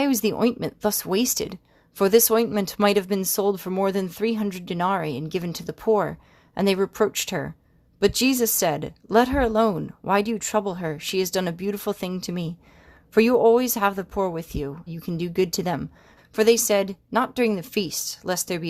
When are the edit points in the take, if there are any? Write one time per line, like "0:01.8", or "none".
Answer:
0:14.9
0:16.2